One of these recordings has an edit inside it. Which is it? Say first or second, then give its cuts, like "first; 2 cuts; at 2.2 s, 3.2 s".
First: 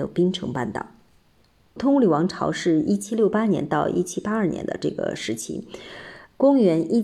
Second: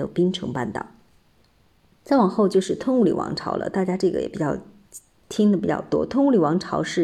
first; 1 cut; at 1.8 s